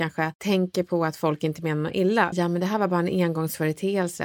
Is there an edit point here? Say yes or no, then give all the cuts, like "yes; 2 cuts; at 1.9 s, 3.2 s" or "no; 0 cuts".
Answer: yes; 1 cut; at 2.3 s